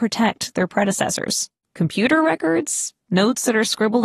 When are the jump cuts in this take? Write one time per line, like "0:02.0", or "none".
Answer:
0:01.6